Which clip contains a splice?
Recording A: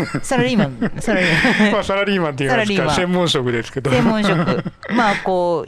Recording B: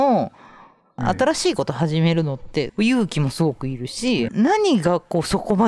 B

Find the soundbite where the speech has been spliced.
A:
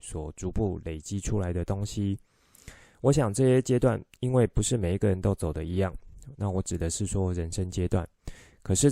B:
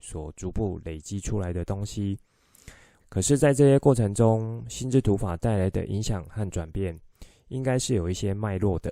B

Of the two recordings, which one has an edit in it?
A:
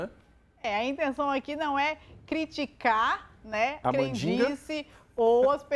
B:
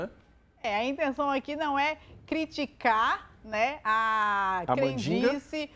A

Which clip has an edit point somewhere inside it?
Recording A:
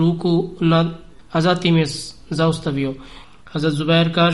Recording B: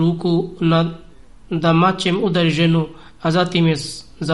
A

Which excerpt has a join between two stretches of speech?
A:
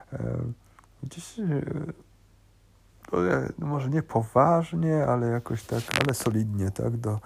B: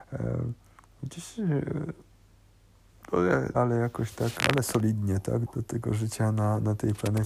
B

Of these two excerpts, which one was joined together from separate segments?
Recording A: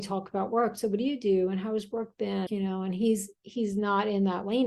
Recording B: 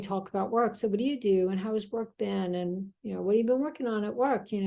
A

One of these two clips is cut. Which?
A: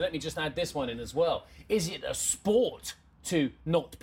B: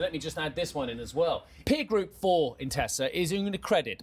B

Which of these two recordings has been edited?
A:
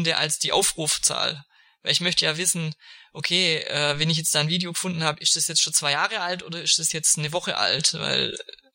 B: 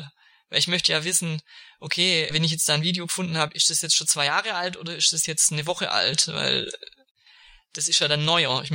B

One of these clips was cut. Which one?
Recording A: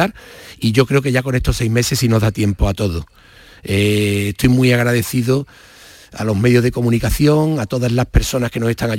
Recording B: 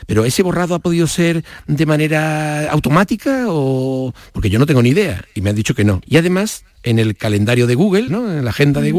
B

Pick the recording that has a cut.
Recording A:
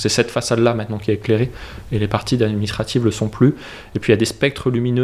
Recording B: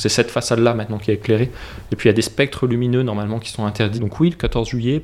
B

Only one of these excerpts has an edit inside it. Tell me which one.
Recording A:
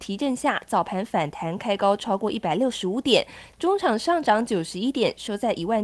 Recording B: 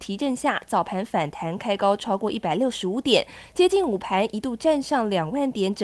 A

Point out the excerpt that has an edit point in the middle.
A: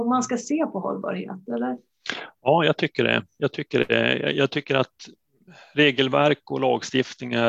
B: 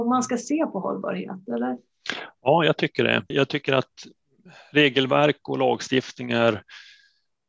B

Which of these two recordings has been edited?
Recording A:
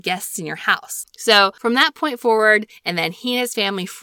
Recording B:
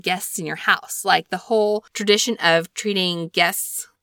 A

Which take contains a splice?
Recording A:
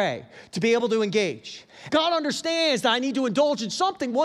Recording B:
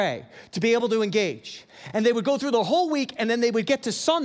A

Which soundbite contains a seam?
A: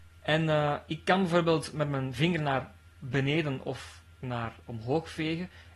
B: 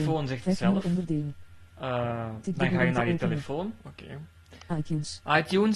B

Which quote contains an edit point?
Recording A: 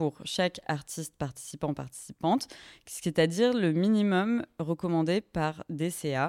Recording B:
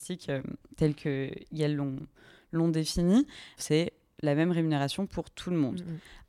B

